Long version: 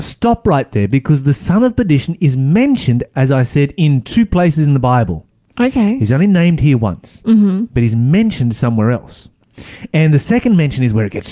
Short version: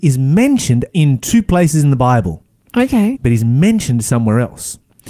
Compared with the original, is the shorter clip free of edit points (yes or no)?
no